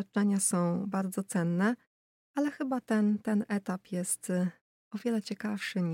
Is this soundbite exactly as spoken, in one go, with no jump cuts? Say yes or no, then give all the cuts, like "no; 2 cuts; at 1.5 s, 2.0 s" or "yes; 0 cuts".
yes; 0 cuts